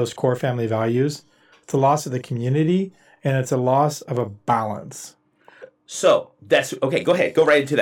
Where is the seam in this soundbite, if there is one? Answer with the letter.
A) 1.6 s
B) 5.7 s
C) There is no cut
C